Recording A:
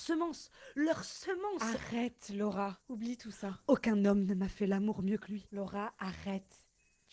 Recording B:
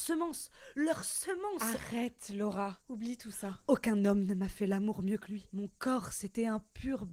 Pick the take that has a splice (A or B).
A